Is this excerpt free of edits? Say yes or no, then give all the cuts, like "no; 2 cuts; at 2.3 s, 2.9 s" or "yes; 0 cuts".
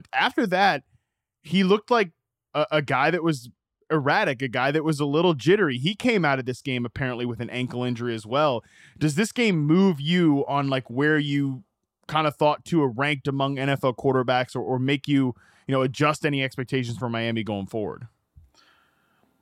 no; 1 cut; at 2.5 s